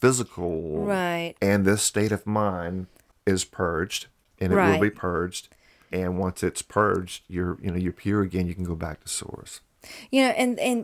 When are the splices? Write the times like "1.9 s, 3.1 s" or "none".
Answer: 1.3 s, 5.9 s